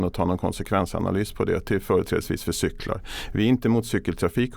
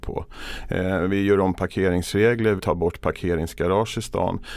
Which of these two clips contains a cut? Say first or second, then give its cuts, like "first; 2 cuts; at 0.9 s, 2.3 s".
second; 1 cut; at 2.6 s